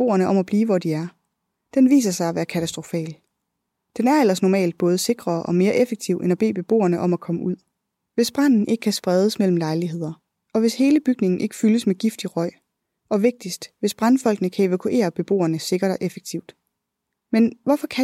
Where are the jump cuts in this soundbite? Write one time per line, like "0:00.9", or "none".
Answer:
none